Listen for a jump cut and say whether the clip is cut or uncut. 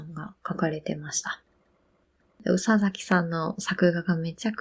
uncut